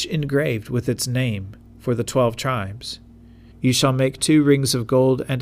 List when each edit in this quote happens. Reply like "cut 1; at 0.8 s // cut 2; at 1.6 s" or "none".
cut 1; at 3.5 s